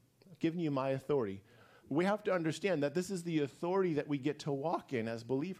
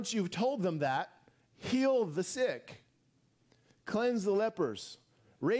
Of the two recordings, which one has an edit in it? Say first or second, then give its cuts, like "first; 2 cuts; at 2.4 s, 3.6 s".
first; 1 cut; at 1.8 s